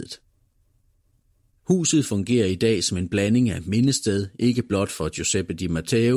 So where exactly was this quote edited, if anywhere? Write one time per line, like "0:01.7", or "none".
none